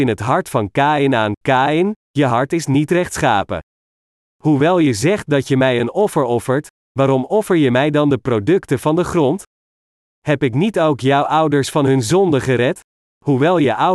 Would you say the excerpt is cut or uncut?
uncut